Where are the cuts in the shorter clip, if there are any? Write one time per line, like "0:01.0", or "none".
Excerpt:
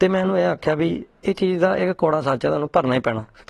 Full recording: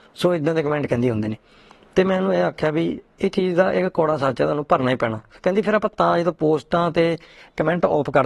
none